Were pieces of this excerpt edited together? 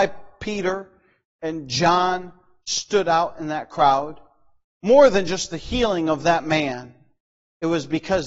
no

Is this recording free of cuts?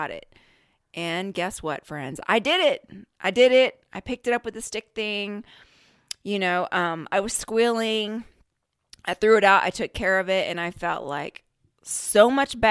yes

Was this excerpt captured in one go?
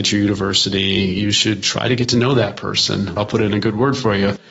no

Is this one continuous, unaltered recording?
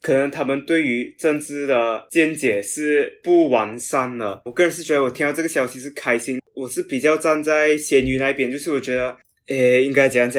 no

